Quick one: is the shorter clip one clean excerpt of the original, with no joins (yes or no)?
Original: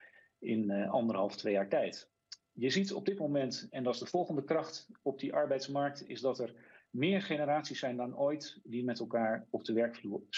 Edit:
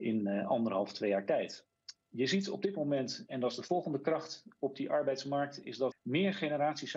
no